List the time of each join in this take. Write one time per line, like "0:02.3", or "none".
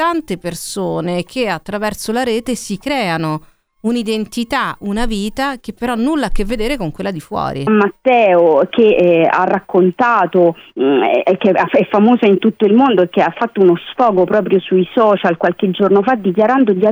0:07.7